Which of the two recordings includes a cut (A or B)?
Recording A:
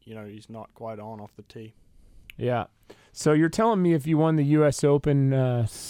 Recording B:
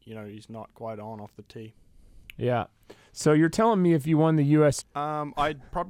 B